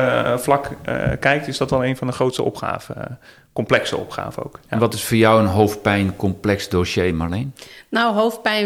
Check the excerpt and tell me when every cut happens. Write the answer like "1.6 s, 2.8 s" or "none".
none